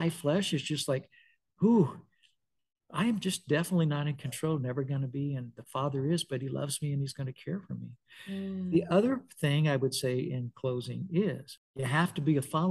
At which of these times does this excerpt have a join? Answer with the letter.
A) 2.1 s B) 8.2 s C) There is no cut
C